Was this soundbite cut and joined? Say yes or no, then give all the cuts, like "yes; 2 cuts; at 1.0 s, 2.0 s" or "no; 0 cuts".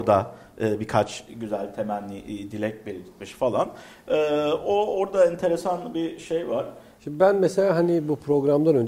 yes; 1 cut; at 7.0 s